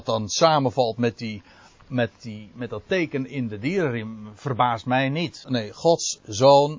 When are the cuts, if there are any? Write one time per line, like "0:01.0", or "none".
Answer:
0:05.4